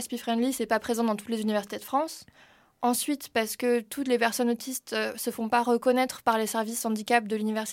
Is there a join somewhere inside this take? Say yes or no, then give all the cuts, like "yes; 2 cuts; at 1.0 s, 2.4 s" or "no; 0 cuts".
no; 0 cuts